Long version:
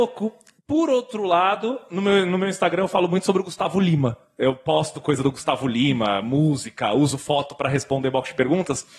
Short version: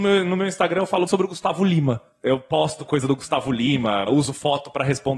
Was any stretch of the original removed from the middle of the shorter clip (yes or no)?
yes